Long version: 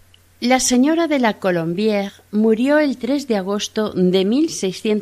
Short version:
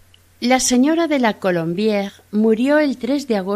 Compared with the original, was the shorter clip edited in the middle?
no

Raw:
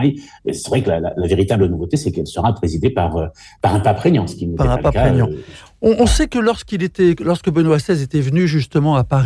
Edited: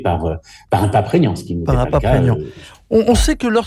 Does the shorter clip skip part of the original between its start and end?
no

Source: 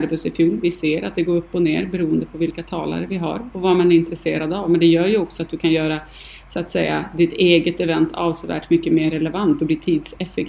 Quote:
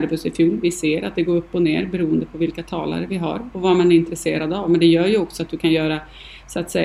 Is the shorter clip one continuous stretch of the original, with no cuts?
yes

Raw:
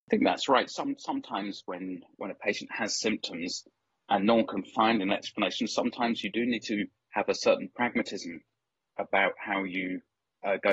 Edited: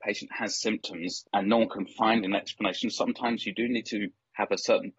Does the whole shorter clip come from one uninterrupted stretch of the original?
no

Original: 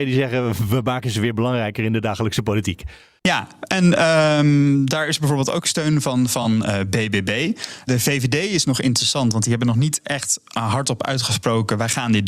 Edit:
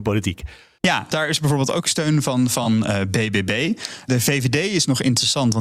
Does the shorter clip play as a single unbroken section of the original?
no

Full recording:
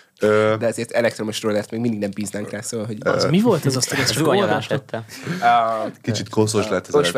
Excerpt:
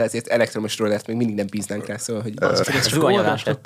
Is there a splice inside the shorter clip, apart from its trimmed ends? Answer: yes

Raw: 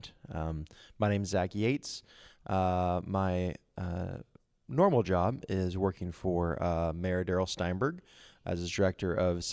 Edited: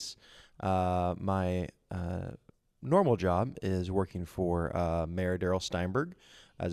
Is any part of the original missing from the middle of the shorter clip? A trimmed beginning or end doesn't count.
no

